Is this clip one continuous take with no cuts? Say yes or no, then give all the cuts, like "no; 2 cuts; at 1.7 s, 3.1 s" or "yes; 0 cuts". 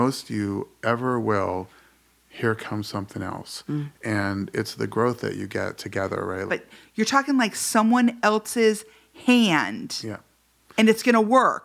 no; 1 cut; at 6.5 s